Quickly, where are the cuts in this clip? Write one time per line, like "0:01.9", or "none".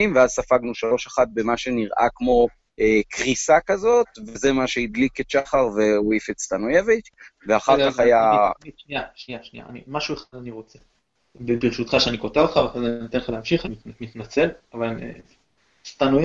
none